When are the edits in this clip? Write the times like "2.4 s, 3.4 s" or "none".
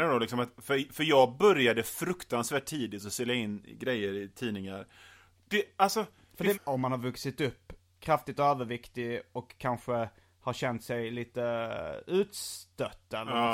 5.4 s, 6.5 s